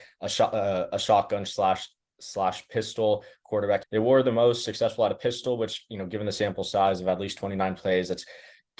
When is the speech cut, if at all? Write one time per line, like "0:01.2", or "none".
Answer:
0:03.8